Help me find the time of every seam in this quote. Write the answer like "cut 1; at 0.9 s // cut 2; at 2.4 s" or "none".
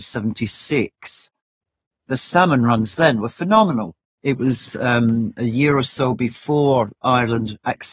cut 1; at 4.1 s